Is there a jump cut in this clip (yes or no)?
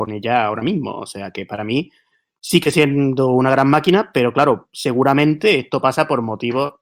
no